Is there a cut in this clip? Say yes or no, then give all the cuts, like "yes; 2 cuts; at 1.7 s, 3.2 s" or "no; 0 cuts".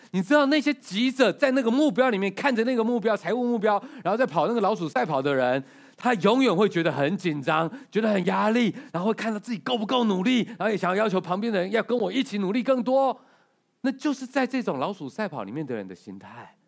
no; 0 cuts